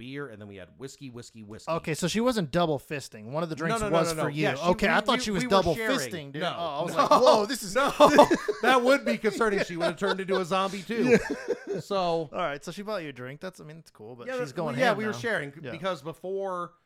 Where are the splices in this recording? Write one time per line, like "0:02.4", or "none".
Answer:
none